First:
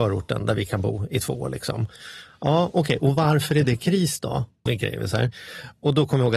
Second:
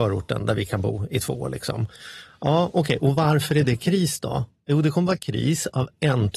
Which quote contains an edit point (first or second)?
first